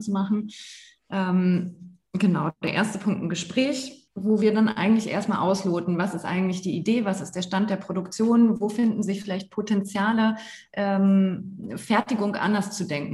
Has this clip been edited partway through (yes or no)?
yes